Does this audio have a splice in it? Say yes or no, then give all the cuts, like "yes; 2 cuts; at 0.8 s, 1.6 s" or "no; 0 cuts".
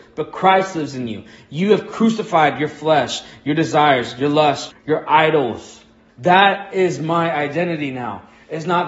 yes; 2 cuts; at 4.7 s, 6.1 s